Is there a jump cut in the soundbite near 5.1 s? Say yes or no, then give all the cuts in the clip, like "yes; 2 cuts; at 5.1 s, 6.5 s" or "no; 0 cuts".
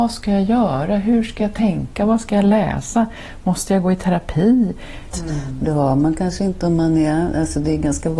yes; 1 cut; at 5.1 s